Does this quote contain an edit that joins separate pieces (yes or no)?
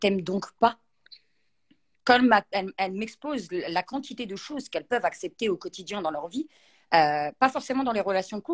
no